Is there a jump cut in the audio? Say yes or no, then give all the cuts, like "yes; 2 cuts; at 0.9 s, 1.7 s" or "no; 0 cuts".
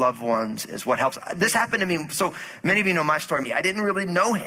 yes; 1 cut; at 3.4 s